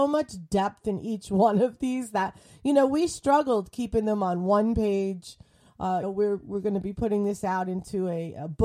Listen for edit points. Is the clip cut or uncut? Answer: cut